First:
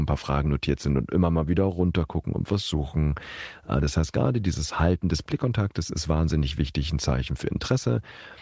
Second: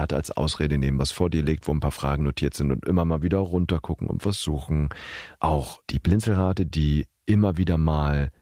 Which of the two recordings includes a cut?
second; 1 cut; at 5.4 s

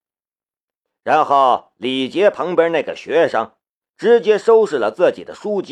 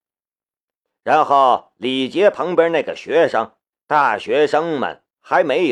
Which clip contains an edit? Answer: second; 1 cut; at 3.7 s

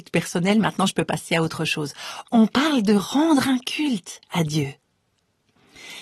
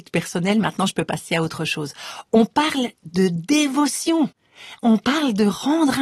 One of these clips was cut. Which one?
first; 1 cut; at 2.3 s

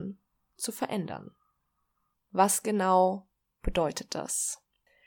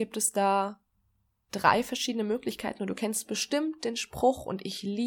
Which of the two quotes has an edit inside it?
first; 1 cut; at 2.1 s

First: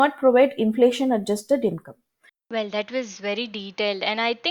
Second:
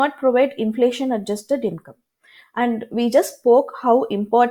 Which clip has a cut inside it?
first; 1 cut; at 2.3 s

